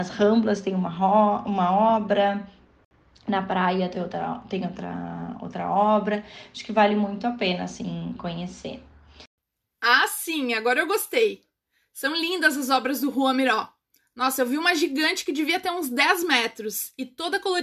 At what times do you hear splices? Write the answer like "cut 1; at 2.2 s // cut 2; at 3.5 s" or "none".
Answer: none